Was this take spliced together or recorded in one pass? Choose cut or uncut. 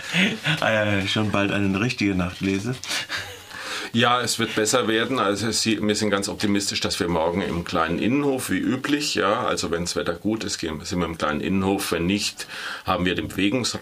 uncut